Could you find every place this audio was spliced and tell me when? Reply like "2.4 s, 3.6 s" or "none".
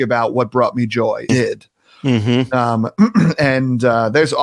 1.3 s